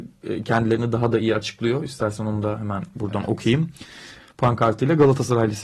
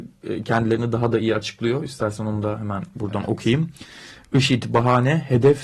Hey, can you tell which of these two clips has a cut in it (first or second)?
first